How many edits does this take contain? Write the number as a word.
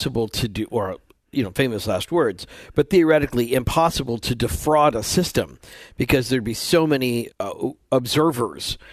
one